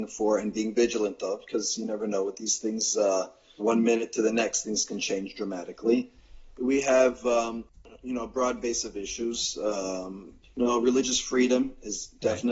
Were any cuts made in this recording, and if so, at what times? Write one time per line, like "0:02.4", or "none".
0:03.6
0:06.6